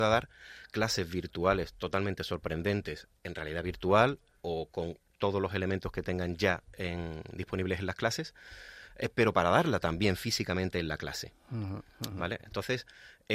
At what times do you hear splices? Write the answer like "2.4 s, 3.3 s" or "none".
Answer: none